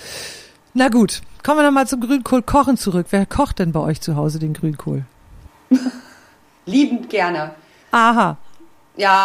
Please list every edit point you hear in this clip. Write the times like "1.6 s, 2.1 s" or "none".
5.5 s, 7.8 s